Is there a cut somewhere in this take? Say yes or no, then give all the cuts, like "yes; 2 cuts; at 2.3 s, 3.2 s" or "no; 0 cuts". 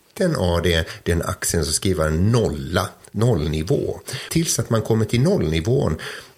yes; 1 cut; at 4.3 s